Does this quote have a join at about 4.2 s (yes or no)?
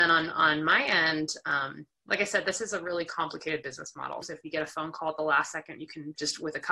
yes